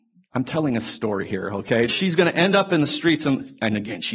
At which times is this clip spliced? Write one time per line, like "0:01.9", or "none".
0:01.9

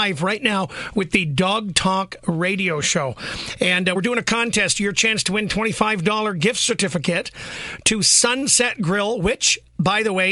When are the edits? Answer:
none

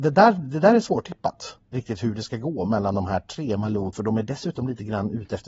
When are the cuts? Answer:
0:01.7
0:03.9

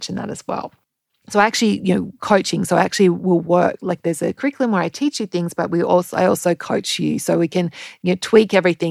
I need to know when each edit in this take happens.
0:01.2

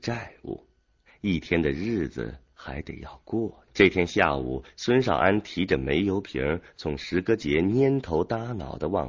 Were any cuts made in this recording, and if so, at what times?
0:03.7

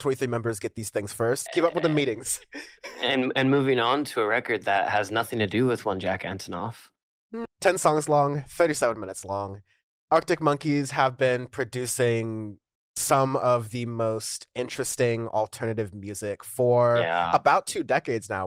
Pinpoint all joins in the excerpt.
0:01.5
0:07.5

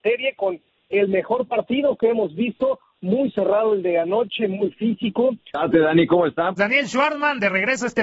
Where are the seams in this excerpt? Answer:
0:05.5
0:06.6

